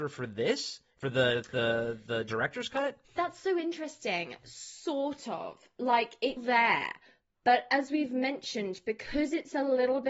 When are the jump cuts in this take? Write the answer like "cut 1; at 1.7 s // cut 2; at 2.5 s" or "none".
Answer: cut 1; at 3.0 s // cut 2; at 6.4 s